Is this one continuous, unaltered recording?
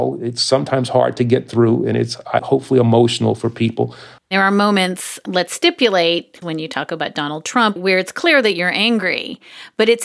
no; 3 cuts; at 4.2 s, 6.4 s, 7.8 s

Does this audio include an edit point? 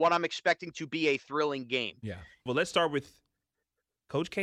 yes; 1 cut; at 2.5 s

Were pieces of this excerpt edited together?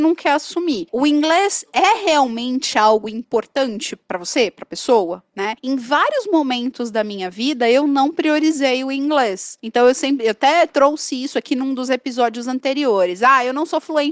no; 0 cuts

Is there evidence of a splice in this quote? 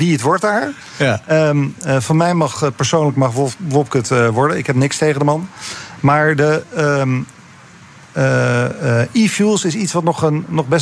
no; 0 cuts

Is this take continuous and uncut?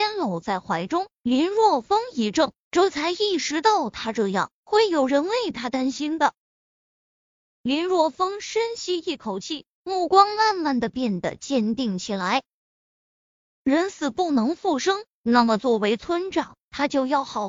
no; 2 cuts; at 7.4 s, 15.1 s

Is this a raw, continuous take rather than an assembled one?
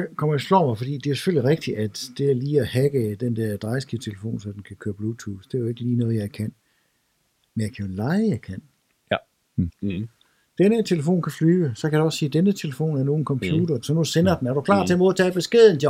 no; 2 cuts; at 9.7 s, 13.8 s

